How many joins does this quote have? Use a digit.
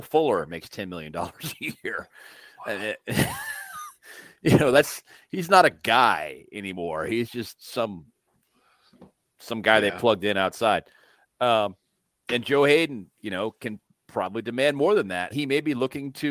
1